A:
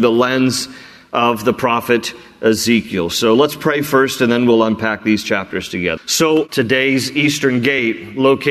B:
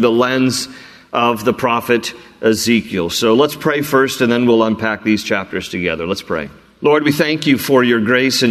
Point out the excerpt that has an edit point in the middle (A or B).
A